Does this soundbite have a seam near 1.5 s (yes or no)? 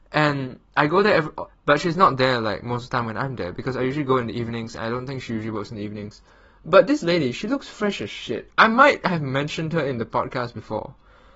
yes